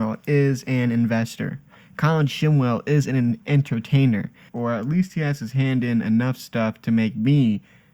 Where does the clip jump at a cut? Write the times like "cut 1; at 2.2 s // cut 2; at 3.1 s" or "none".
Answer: cut 1; at 4.5 s